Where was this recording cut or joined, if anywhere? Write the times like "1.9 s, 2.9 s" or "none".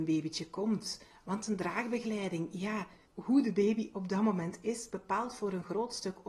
none